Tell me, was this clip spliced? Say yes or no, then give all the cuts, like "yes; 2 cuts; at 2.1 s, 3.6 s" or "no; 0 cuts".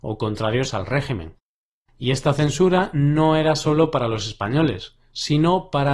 no; 0 cuts